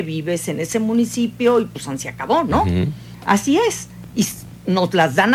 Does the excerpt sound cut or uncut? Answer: uncut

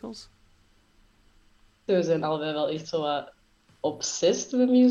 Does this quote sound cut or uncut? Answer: cut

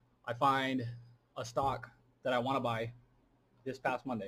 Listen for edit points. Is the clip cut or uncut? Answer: uncut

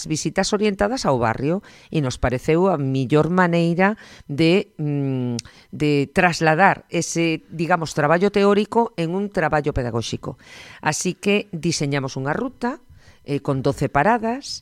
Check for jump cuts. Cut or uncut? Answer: uncut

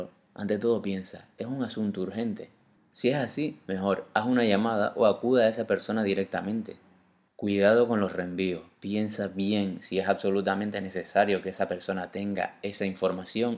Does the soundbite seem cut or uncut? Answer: uncut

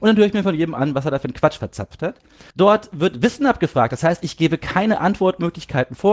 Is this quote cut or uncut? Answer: cut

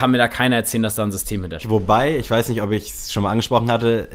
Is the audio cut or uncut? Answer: cut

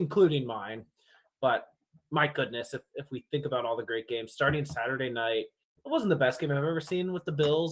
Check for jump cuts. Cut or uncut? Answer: uncut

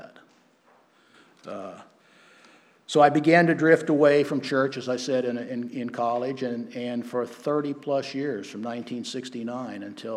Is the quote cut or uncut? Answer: uncut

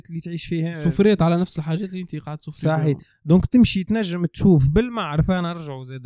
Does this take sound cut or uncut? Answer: uncut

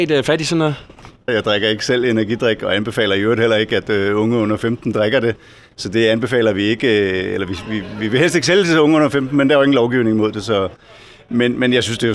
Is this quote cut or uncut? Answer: cut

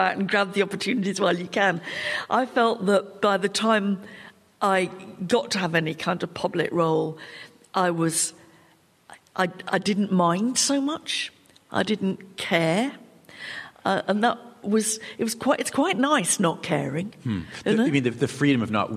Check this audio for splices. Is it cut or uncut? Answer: uncut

